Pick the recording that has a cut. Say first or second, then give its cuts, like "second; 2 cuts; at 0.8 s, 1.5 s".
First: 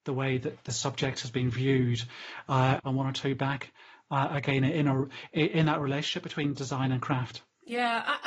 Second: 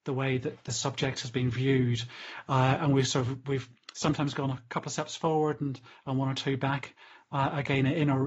first; 1 cut; at 2.8 s